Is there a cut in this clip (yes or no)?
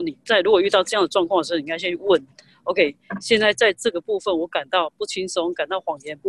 no